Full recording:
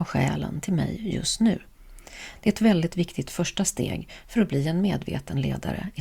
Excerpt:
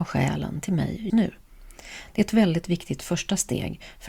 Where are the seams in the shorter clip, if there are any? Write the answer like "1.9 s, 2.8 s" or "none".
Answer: 1.1 s